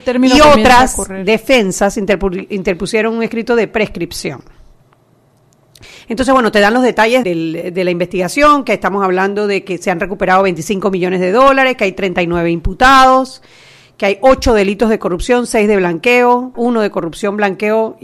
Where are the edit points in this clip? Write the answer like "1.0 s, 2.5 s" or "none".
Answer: 7.2 s, 16.5 s

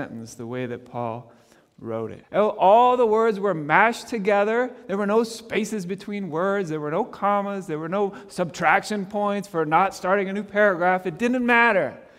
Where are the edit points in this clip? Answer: 2.2 s

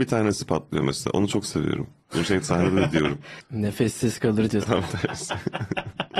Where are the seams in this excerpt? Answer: 3.4 s, 4.6 s

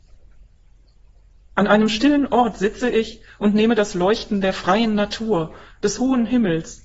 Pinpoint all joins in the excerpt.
none

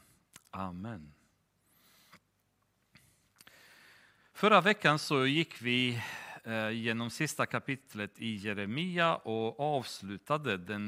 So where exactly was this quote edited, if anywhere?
none

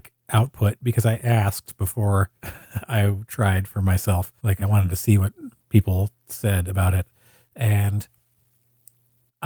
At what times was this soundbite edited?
2.4 s, 4.4 s

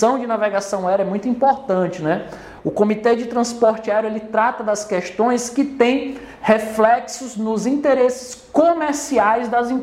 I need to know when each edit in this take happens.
2.6 s

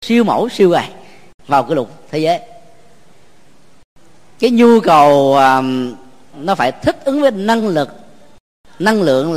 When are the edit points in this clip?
6.3 s

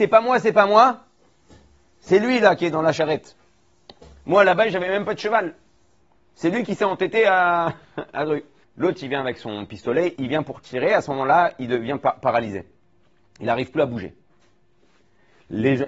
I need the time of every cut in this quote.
8.6 s, 10.1 s

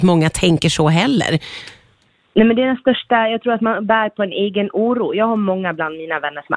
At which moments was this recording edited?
none

